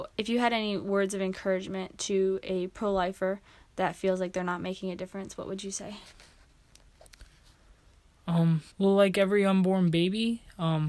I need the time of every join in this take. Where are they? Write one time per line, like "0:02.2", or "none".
0:08.7